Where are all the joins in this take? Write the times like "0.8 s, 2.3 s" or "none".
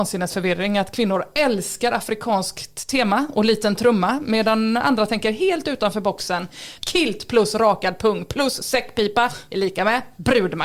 6.8 s

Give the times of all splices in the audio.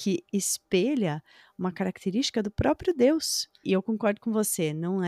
3.6 s

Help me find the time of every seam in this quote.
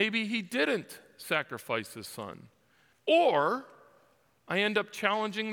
2.9 s

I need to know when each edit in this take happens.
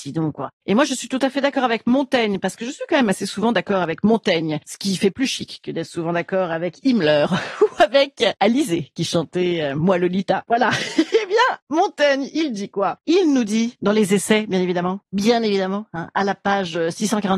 none

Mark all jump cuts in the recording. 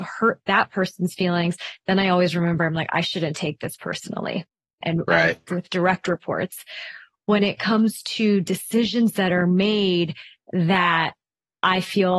4.8 s

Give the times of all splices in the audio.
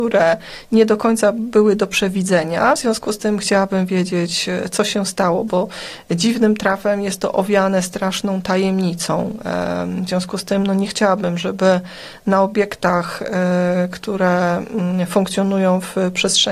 none

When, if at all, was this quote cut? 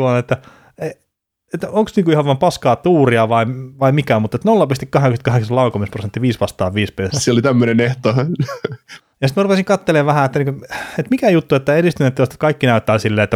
7.1 s, 9.0 s

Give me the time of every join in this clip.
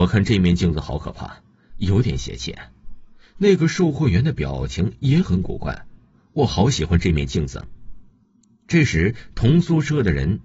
6.1 s

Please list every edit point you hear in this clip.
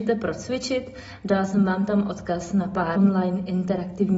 3.0 s

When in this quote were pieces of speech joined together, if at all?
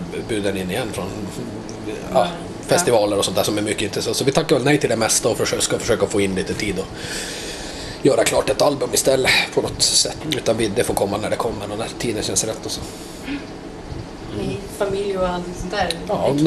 10.2 s

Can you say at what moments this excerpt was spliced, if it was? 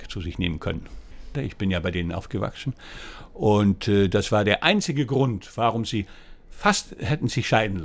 1.3 s

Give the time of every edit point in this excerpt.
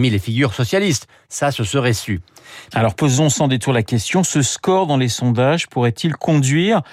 1.3 s, 2.7 s

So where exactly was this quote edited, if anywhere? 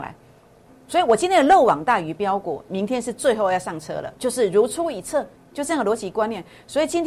4.2 s, 5.4 s

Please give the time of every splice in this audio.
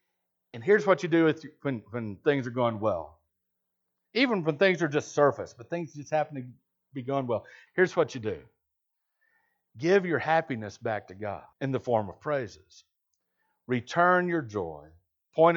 7.7 s, 11.5 s

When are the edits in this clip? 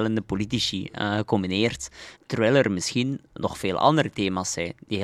2.2 s, 3.4 s

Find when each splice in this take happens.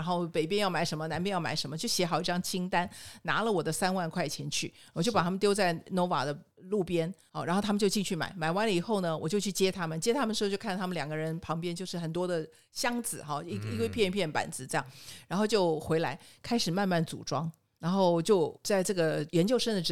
none

